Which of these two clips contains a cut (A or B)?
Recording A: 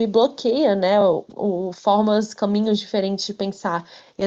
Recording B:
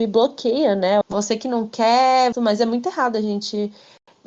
B